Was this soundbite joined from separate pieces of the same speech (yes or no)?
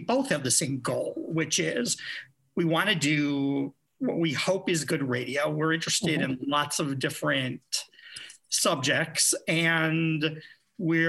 no